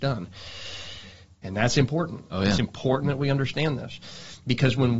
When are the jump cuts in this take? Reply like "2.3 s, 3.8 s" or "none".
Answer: 1.4 s